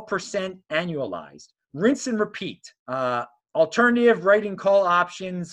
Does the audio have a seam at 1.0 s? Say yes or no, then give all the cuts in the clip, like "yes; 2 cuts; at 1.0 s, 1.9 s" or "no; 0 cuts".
no; 1 cut; at 2.8 s